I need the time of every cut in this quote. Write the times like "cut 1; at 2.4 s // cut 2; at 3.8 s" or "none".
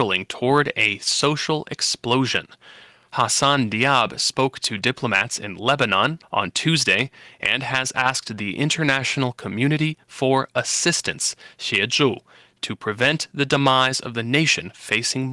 cut 1; at 6.2 s